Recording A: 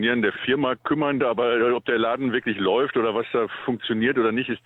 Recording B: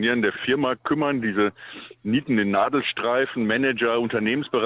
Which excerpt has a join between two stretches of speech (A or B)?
A